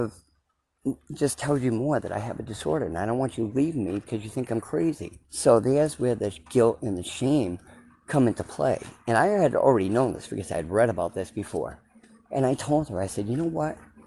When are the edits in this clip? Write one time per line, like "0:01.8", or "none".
0:05.2